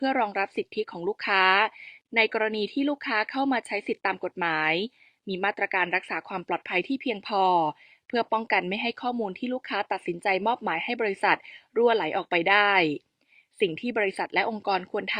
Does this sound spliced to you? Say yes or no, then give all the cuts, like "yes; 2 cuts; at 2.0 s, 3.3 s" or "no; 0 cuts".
no; 0 cuts